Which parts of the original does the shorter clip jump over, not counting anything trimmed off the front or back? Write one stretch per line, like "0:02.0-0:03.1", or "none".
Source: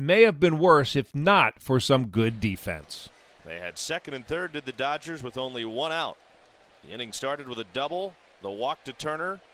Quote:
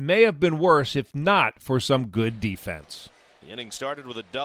0:03.4-0:06.8